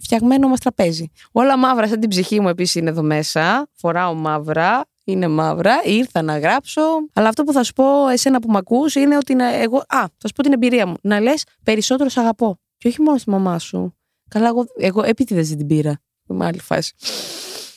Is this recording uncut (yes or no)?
no